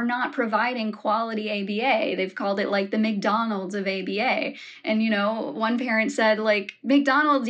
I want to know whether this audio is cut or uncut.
uncut